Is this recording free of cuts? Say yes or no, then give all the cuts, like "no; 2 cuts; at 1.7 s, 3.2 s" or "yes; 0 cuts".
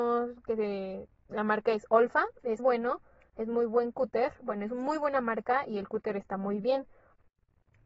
no; 1 cut; at 2.6 s